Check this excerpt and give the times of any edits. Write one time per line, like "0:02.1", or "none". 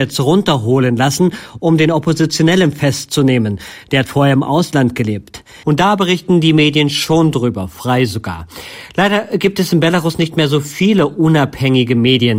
0:05.6